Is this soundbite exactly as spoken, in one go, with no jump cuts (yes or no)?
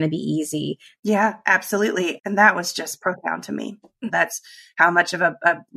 no